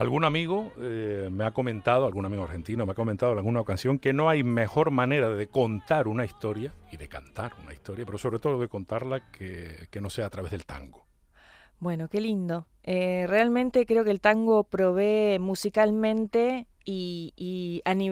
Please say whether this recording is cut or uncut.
uncut